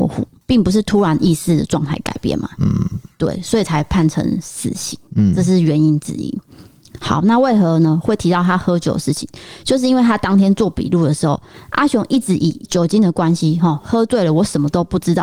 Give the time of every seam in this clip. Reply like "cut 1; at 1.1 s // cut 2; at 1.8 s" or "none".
none